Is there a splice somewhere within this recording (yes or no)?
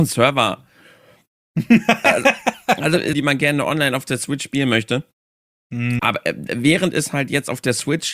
yes